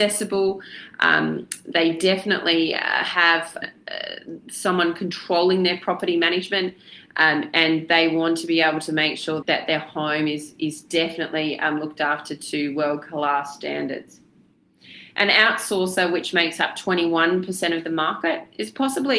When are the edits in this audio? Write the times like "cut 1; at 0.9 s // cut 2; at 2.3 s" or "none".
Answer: cut 1; at 3.6 s // cut 2; at 9.4 s